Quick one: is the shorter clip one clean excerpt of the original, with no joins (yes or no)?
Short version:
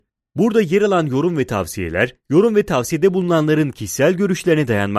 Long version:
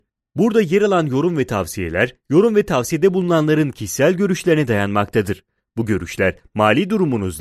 yes